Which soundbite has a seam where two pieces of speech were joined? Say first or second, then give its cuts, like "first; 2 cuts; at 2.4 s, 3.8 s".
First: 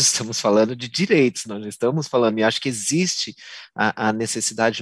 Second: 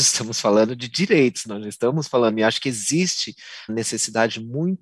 second; 1 cut; at 3.7 s